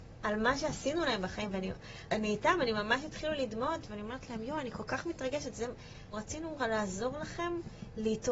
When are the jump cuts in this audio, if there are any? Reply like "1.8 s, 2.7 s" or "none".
2.1 s, 6.1 s